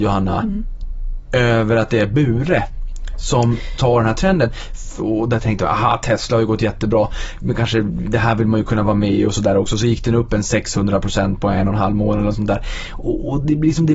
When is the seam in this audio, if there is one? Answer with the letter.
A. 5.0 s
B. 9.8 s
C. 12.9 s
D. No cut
A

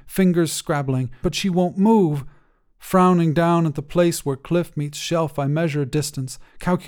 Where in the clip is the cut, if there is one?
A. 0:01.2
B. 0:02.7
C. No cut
A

